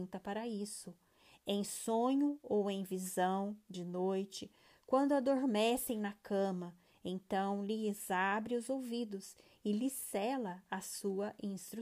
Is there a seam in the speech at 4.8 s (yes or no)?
yes